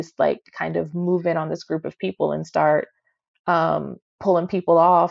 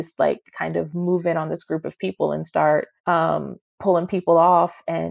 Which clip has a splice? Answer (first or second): second